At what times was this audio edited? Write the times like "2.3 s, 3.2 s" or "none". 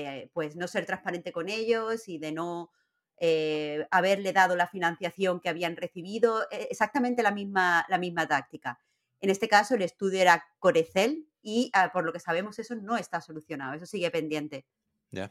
none